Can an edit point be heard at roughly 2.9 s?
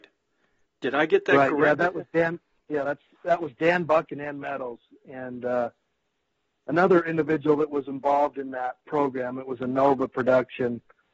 no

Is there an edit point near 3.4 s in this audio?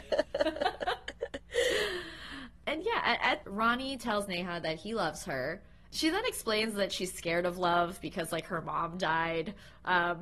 yes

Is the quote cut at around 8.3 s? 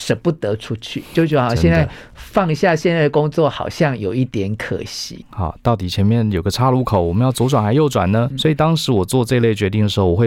yes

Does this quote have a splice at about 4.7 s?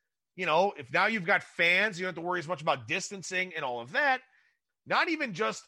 yes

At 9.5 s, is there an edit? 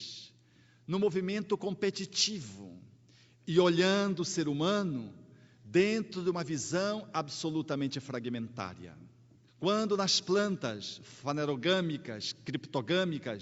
yes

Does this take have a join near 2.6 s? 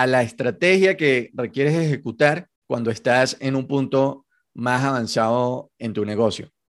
yes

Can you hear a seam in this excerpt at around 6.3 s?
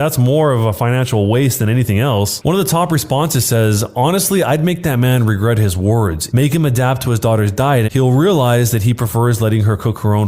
yes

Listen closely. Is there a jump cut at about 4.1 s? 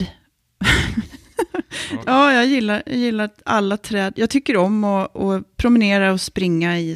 no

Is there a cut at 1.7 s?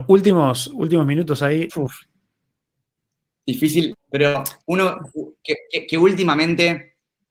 yes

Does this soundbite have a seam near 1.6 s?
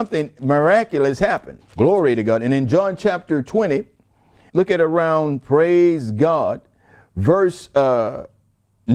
yes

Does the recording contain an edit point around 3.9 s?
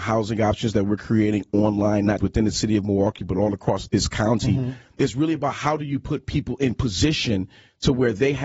yes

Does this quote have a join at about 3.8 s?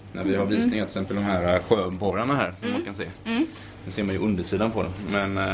no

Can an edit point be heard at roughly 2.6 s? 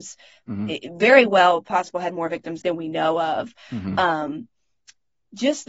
yes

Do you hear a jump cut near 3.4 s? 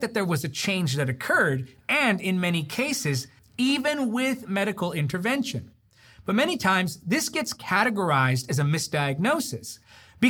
yes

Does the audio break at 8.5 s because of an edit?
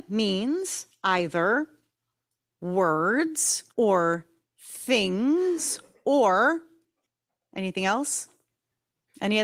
no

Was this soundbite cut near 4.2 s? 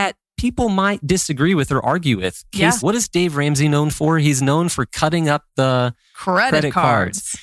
no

